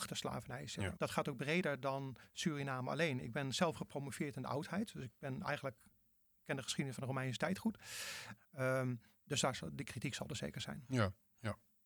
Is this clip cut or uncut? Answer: cut